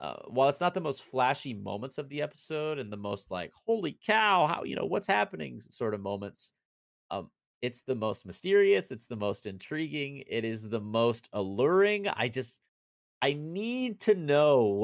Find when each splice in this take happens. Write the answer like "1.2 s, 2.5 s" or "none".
none